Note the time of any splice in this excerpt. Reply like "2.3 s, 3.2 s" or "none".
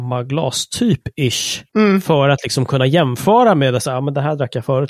none

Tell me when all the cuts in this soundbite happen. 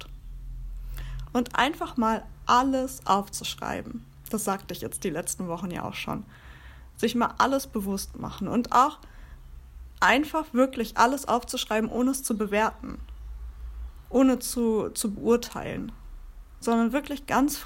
1.2 s

